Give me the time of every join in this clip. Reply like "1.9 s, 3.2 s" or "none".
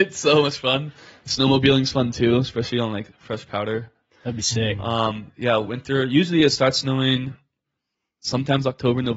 none